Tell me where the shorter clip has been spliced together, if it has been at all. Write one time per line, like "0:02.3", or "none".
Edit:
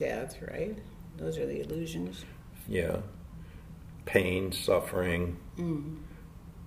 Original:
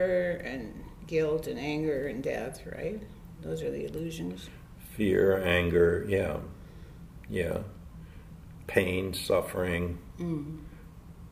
0:02.6

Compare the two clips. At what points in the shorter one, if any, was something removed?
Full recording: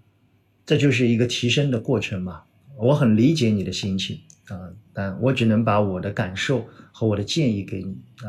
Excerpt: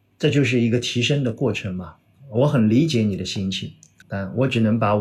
0:04.0

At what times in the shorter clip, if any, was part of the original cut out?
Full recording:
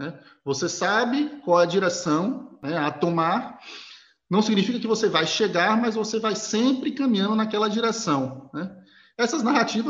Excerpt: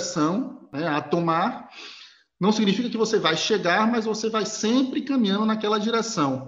none

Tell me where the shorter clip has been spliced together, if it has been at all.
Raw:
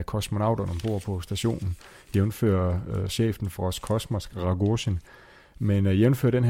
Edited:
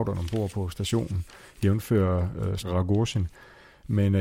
0:02.6

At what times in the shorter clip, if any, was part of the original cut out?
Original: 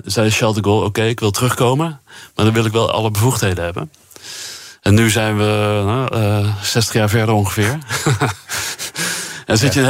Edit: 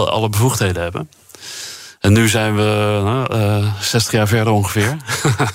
none

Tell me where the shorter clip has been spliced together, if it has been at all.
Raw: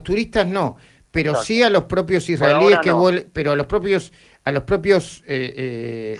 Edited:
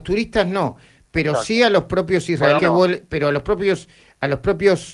0:02.6

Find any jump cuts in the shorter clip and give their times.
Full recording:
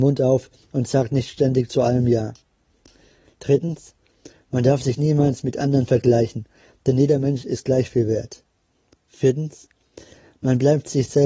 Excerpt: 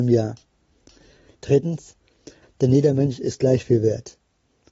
0:02.4

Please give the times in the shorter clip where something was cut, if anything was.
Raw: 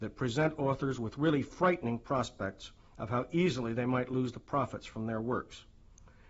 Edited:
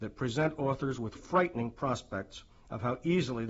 0:01.1

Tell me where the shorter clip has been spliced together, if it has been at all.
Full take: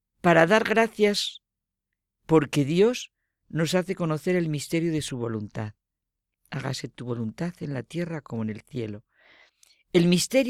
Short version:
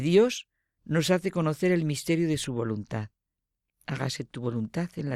none

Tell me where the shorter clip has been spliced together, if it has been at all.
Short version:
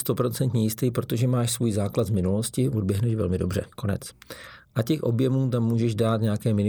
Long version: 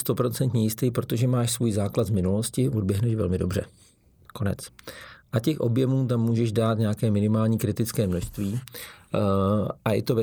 0:03.7

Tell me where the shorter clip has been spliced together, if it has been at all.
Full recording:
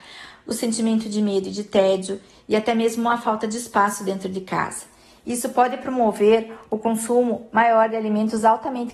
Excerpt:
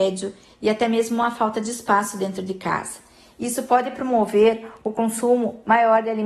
none

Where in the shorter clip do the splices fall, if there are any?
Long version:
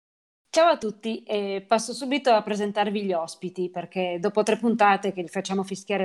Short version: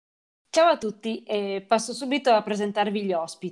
none

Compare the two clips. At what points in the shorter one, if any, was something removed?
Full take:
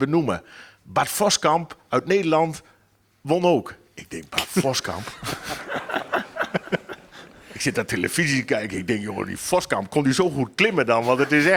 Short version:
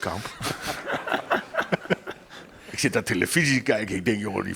none

